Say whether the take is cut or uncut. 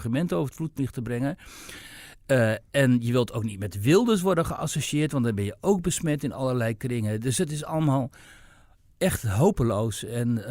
uncut